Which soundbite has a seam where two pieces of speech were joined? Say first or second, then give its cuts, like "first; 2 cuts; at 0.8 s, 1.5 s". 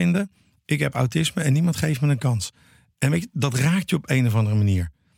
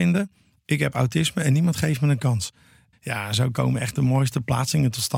second; 1 cut; at 2.9 s